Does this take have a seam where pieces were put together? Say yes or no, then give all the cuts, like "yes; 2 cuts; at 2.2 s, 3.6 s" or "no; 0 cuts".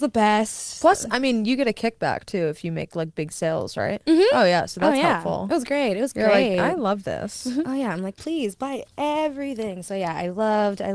yes; 1 cut; at 8.2 s